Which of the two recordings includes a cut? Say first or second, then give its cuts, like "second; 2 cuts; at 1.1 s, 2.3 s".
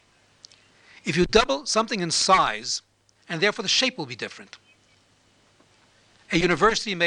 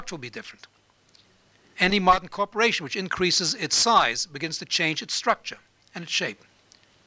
first; 1 cut; at 3.2 s